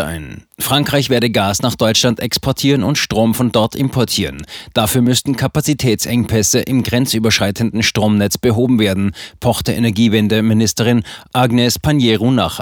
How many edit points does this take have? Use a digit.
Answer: 0